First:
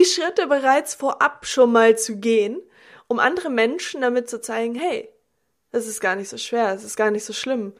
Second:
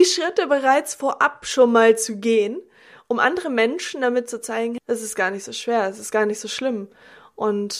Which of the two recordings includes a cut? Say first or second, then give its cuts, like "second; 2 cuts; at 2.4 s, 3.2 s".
second; 1 cut; at 4.8 s